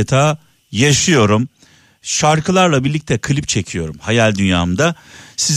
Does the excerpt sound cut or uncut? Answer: uncut